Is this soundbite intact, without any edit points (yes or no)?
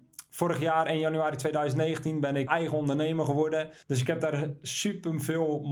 no